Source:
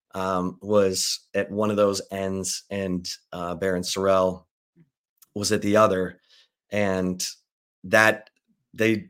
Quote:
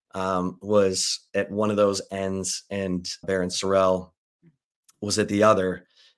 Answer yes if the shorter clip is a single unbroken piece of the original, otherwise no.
no